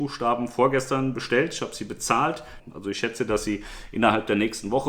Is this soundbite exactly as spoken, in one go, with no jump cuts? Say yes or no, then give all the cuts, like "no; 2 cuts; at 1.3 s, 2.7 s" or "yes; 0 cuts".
no; 1 cut; at 2.6 s